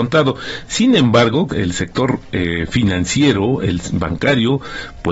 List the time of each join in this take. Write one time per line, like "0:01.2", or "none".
0:01.5

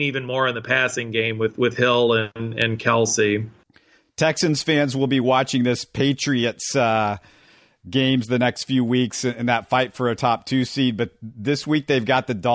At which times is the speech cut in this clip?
none

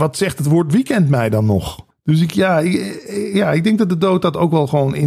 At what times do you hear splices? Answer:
0:01.9

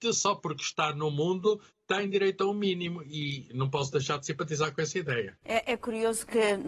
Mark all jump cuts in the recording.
0:05.4

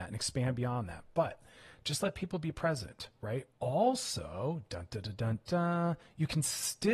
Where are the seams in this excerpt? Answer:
0:03.5

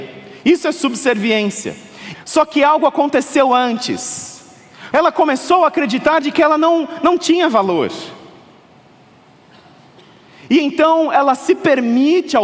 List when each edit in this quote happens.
0:02.1
0:04.9

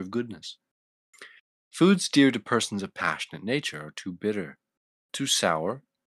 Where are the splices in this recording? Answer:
none

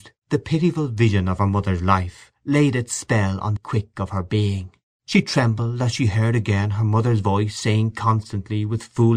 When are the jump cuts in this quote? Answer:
0:03.6
0:04.9

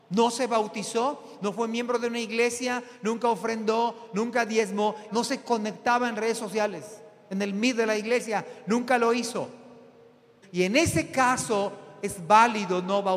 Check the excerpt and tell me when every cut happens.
0:05.1
0:10.4

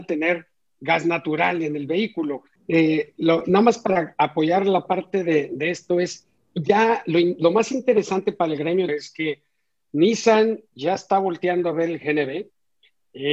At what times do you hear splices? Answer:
0:02.6
0:06.4
0:08.9

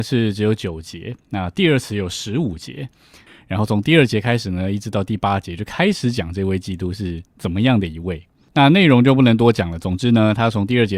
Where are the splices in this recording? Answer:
0:03.3

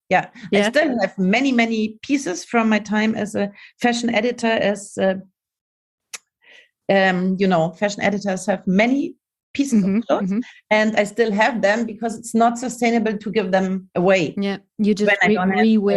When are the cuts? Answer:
none

